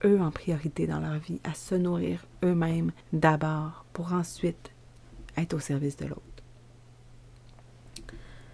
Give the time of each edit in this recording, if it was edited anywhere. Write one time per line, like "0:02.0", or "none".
0:03.0